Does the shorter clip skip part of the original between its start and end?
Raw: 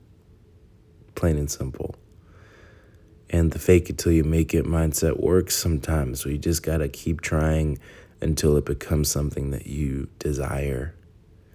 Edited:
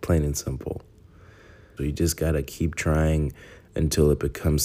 yes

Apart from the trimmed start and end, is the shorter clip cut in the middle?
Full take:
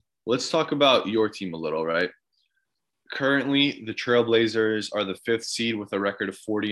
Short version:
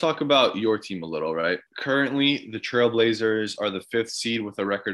yes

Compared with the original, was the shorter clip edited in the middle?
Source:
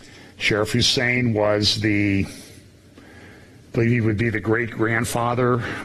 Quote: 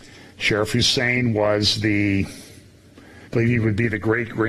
yes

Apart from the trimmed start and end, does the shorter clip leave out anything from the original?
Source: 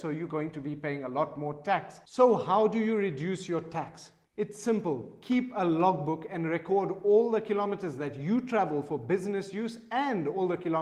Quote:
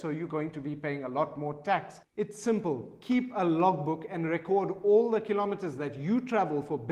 yes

